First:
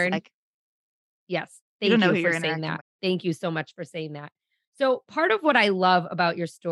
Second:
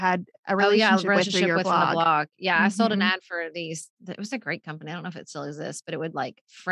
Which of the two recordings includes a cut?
first; 1 cut; at 2.8 s

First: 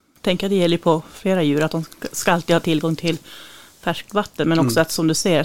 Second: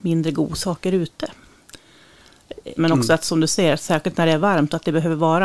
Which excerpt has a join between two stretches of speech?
second; 1 cut; at 2.8 s

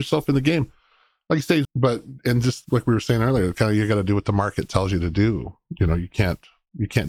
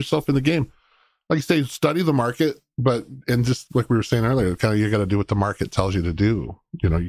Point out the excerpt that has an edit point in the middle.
first; 1 cut; at 1.6 s

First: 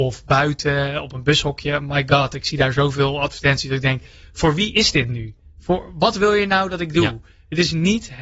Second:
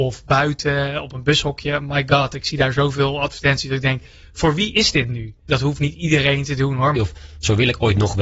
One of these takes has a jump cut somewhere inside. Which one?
second; 2 cuts; at 5.5 s, 7.0 s

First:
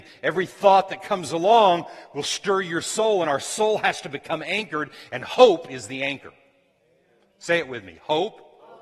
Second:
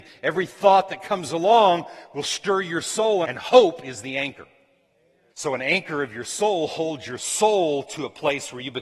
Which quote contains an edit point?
second; 2 cuts; at 3.2 s, 5.3 s

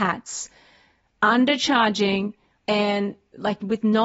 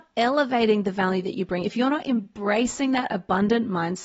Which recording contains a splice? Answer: first; 1 cut; at 2.6 s

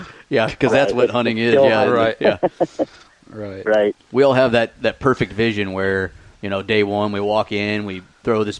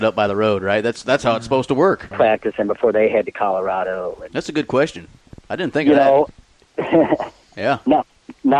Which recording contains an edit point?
second; 1 cut; at 2.1 s

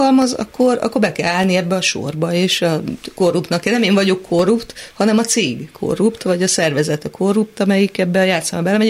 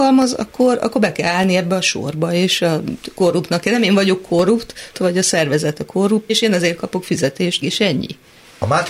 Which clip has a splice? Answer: second; 3 cuts; at 4.9 s, 6.3 s, 7.6 s

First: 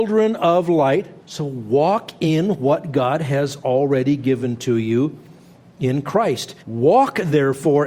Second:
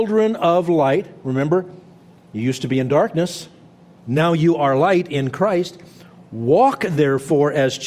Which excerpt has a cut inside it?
first; 2 cuts; at 1.2 s, 6.6 s

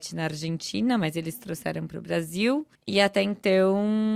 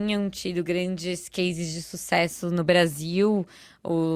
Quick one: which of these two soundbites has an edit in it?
first; 1 cut; at 2.8 s

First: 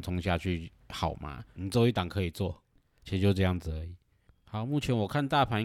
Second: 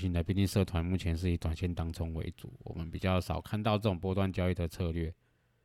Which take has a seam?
first; 2 cuts; at 1.6 s, 3.0 s

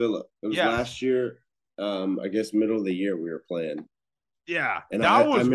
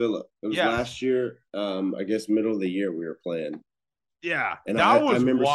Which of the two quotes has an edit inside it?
second; 1 cut; at 1.5 s

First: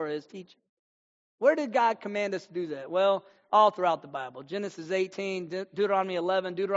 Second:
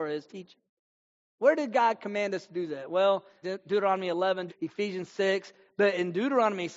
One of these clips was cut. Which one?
second; 2 cuts; at 3.4 s, 4.5 s

